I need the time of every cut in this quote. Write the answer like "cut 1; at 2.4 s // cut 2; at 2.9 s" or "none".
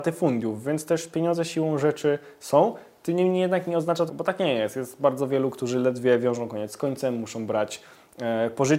cut 1; at 4.1 s